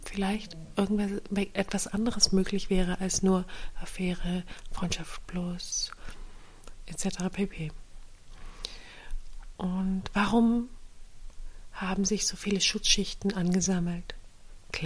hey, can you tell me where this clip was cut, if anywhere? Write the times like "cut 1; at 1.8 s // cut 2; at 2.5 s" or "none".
none